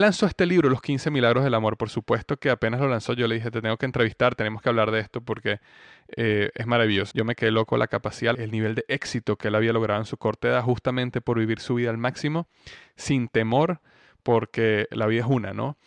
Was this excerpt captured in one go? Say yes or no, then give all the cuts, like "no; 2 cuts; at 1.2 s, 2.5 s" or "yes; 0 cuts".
no; 2 cuts; at 7.1 s, 8.3 s